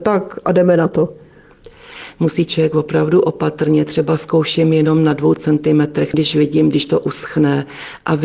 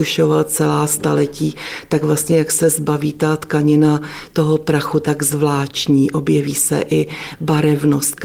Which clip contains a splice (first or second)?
first